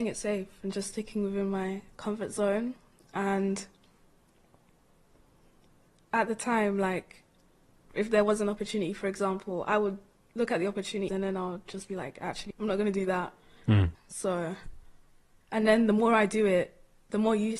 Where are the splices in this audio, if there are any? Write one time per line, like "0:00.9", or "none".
0:11.1
0:12.5
0:13.9